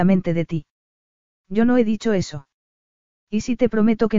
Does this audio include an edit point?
no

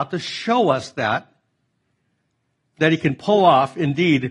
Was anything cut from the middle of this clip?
no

